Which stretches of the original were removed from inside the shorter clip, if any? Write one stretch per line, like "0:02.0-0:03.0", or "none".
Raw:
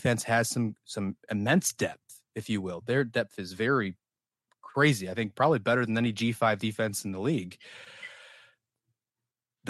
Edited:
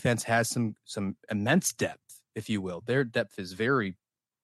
none